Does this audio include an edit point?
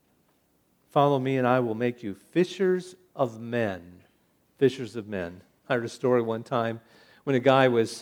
no; 0 cuts

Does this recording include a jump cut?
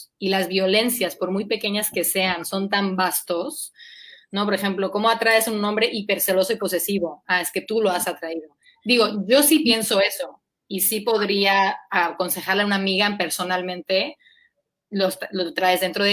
no; 0 cuts

